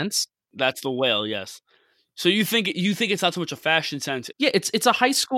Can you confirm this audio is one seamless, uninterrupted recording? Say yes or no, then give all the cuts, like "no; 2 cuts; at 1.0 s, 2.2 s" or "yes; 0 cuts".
no; 1 cut; at 4.3 s